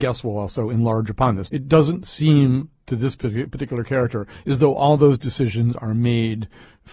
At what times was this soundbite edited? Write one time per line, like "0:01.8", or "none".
0:01.4